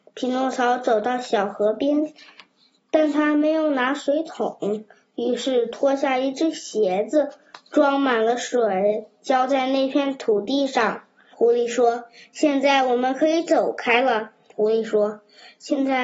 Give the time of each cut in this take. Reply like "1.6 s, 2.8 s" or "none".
11.3 s, 14.5 s

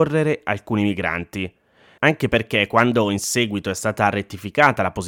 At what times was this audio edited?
2.0 s

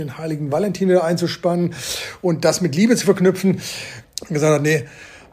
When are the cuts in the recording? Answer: 4.0 s

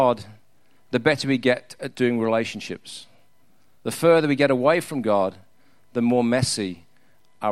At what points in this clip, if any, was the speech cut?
none

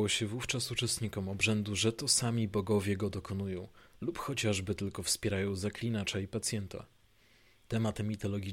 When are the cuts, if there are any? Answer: 7.5 s

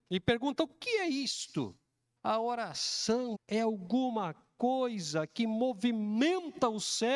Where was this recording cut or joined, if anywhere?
2.2 s, 3.3 s

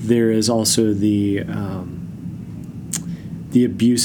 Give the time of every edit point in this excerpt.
none

